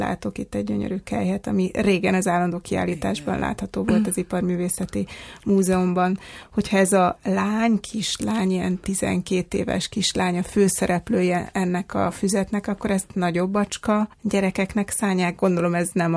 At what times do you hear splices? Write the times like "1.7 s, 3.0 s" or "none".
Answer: 14.1 s